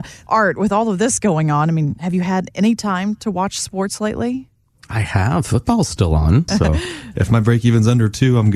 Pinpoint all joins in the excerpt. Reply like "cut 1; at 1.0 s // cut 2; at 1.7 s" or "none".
cut 1; at 6.5 s